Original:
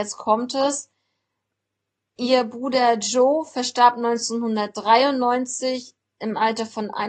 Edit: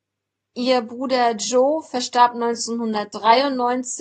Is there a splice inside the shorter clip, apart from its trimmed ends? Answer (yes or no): no